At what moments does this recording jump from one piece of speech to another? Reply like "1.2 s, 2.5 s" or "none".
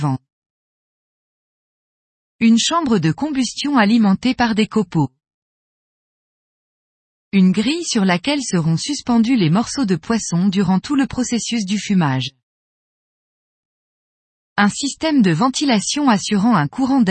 none